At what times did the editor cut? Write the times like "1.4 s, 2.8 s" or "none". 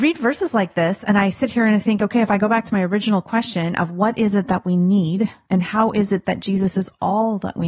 none